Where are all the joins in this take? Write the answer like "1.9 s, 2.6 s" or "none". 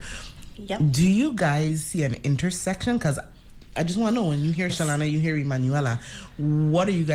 4.7 s